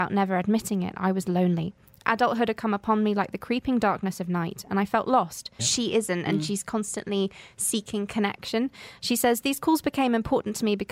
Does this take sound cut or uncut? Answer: cut